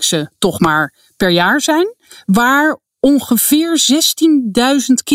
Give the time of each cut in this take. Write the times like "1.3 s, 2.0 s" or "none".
none